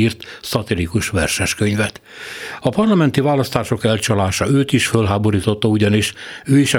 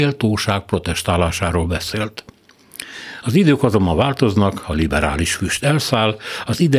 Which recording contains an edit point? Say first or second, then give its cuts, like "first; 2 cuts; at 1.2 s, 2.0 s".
second; 1 cut; at 3.2 s